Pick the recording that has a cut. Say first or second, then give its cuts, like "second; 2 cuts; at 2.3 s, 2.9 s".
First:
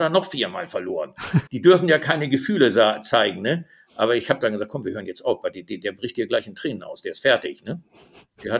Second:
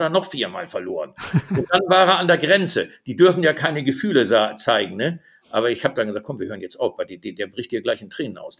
first; 1 cut; at 1.5 s